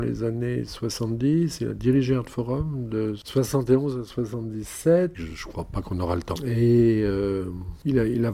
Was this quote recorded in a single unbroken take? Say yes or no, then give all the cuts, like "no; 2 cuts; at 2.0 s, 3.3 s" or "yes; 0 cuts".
no; 2 cuts; at 5.1 s, 6.4 s